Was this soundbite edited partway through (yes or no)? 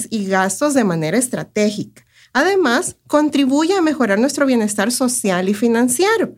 yes